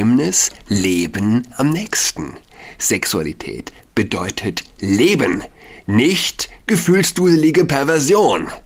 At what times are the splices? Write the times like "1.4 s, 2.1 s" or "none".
none

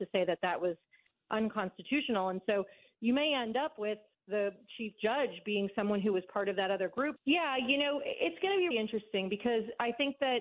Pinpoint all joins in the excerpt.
7.2 s, 8.7 s

